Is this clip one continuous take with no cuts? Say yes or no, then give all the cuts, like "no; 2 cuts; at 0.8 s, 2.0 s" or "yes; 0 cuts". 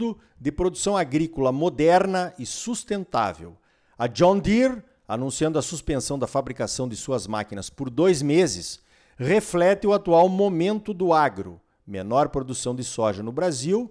yes; 0 cuts